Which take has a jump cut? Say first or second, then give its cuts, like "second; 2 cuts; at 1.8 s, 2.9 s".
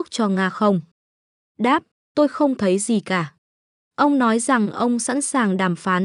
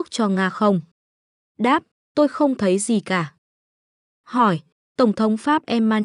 first; 1 cut; at 3.7 s